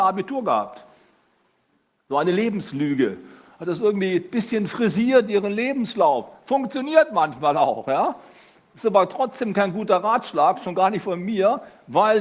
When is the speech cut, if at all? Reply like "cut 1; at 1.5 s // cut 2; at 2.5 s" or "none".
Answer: none

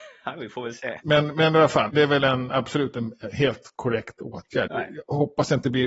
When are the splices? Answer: cut 1; at 1.0 s // cut 2; at 4.7 s

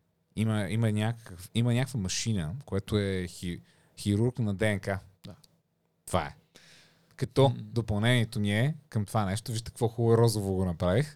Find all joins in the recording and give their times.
cut 1; at 5.1 s

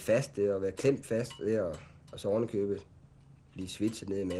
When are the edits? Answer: none

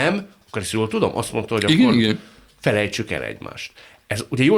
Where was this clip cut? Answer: none

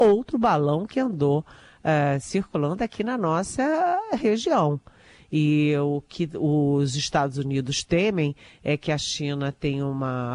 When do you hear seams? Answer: none

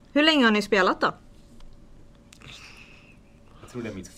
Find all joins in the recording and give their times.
none

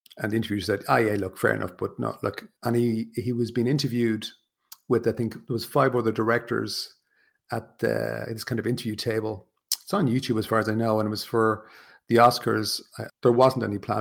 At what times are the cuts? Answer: cut 1; at 2.6 s // cut 2; at 13.1 s

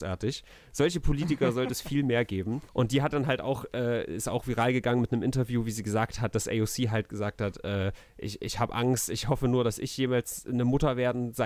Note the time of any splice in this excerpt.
cut 1; at 2.7 s

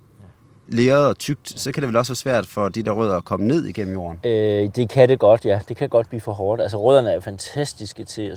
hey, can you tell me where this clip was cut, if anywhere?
none

